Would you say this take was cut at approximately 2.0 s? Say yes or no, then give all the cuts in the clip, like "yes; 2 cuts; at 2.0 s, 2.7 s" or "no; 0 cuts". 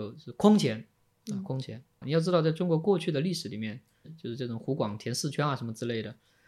yes; 1 cut; at 2.0 s